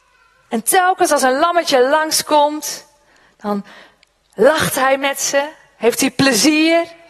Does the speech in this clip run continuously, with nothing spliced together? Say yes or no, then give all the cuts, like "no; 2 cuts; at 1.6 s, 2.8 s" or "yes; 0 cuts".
yes; 0 cuts